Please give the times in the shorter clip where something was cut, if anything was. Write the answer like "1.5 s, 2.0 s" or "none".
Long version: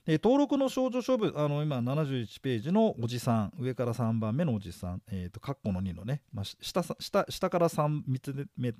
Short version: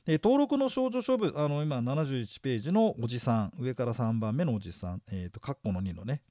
none